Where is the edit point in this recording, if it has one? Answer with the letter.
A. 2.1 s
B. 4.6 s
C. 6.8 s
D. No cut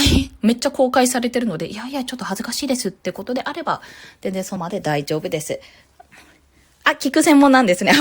B